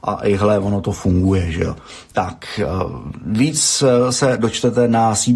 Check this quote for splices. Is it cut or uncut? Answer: uncut